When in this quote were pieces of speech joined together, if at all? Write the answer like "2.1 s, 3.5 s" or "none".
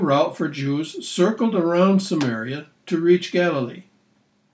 none